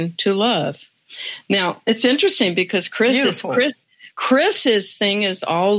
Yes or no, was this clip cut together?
no